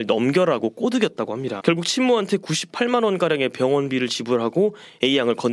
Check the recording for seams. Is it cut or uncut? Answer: cut